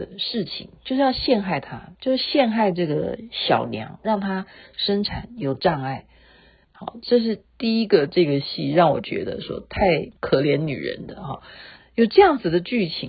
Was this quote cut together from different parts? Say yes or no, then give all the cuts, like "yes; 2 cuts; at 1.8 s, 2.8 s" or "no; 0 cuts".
yes; 3 cuts; at 6.6 s, 10.2 s, 11.8 s